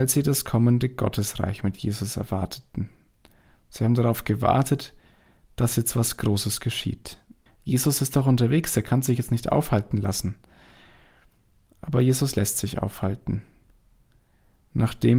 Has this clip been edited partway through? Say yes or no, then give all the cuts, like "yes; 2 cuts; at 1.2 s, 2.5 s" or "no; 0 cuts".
yes; 1 cut; at 7.5 s